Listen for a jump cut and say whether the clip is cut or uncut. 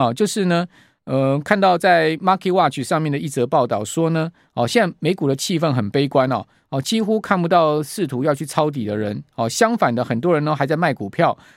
uncut